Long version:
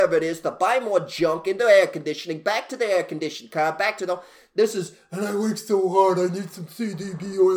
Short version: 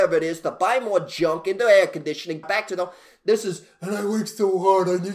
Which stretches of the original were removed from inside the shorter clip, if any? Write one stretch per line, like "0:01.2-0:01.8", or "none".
0:02.4-0:03.7